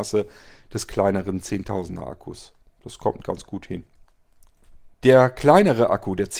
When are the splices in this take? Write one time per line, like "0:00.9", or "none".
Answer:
0:04.9